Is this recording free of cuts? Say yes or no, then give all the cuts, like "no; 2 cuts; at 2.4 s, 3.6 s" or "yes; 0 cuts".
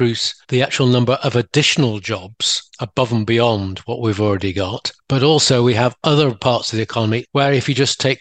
no; 1 cut; at 7.2 s